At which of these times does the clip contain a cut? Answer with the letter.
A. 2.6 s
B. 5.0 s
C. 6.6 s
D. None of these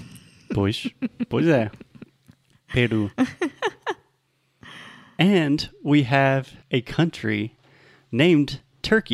C